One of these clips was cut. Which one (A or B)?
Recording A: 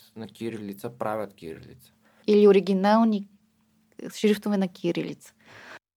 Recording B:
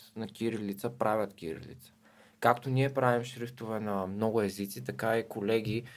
A